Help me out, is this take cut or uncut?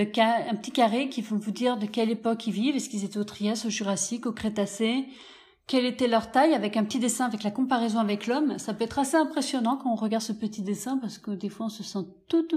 uncut